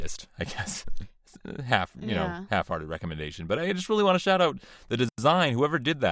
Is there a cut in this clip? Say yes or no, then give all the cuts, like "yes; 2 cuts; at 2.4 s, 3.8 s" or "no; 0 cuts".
no; 0 cuts